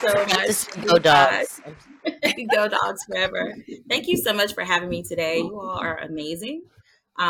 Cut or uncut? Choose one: uncut